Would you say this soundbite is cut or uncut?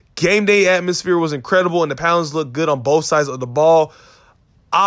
uncut